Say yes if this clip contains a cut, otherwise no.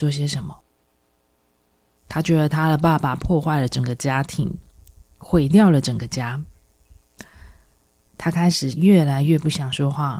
yes